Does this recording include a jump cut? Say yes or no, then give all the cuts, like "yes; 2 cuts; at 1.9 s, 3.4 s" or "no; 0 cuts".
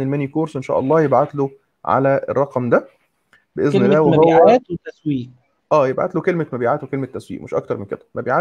no; 0 cuts